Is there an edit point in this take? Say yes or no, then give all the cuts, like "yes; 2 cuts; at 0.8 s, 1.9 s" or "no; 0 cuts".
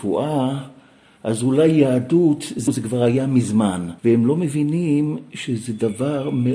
yes; 1 cut; at 4.0 s